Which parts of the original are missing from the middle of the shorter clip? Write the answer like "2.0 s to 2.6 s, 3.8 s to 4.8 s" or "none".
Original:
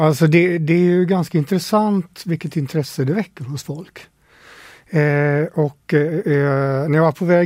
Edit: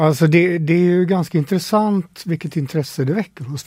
none